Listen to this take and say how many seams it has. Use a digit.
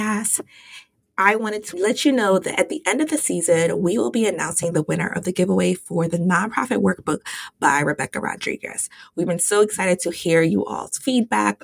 0